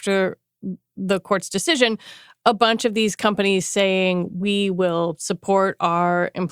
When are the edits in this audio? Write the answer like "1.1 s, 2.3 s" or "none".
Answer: none